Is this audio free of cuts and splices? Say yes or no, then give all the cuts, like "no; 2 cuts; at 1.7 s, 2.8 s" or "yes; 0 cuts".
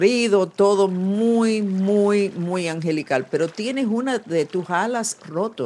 yes; 0 cuts